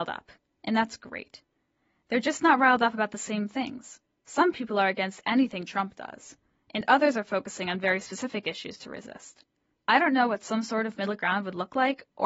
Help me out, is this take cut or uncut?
uncut